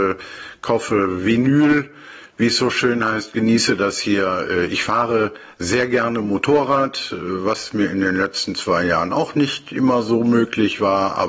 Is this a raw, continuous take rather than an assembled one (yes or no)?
yes